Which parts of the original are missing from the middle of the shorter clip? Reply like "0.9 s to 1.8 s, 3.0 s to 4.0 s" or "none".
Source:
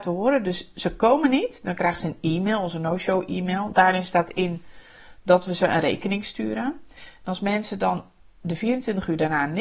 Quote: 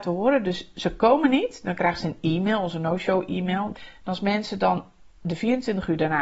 3.7 s to 6.9 s